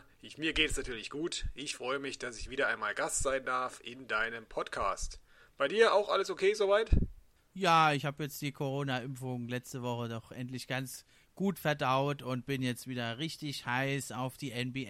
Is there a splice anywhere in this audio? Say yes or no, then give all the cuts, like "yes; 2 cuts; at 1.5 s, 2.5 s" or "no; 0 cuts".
no; 0 cuts